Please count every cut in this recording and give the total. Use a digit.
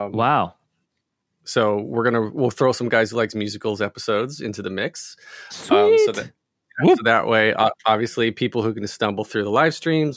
0